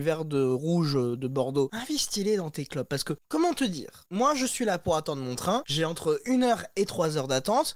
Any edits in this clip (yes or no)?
no